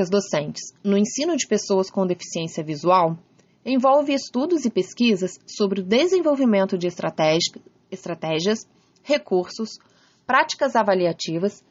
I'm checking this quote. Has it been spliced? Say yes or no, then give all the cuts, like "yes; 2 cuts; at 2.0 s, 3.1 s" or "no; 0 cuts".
no; 0 cuts